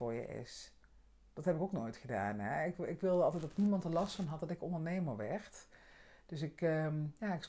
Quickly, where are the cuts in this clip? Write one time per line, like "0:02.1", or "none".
none